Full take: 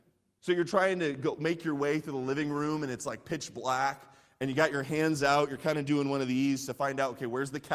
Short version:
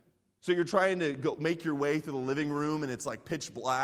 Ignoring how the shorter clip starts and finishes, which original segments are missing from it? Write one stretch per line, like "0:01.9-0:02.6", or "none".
none